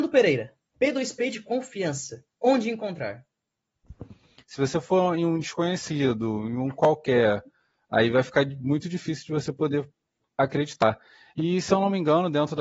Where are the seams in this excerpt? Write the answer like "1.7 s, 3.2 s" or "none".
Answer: 4.4 s